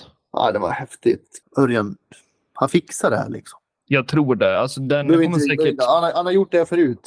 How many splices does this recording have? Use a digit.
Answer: 1